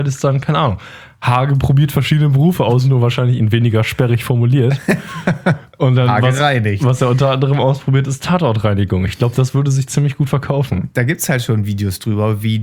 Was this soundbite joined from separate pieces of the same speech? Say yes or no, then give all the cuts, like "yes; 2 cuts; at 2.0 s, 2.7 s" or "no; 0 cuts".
no; 0 cuts